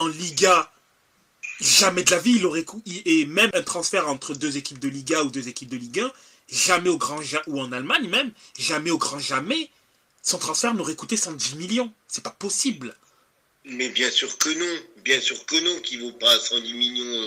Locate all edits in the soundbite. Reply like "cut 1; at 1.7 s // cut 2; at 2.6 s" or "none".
cut 1; at 3.5 s